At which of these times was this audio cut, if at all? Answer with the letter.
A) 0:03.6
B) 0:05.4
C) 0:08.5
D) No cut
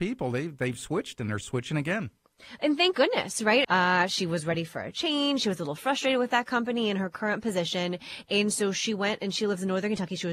A